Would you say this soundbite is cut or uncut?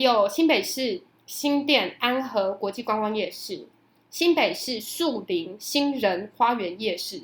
uncut